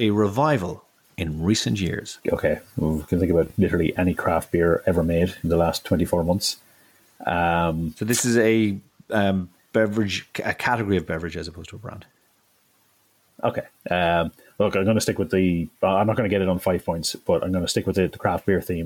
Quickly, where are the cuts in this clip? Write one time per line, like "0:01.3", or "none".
0:02.2